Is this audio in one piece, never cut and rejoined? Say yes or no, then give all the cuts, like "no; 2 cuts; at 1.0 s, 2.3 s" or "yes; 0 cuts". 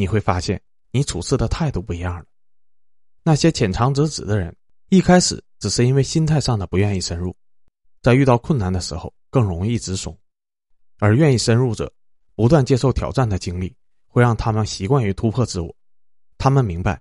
no; 1 cut; at 7.8 s